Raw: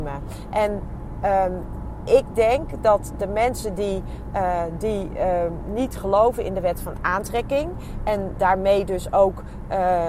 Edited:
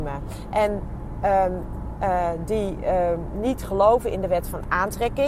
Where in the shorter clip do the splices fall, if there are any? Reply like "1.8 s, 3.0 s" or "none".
2.0 s